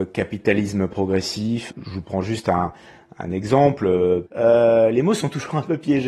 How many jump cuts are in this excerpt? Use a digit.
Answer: 2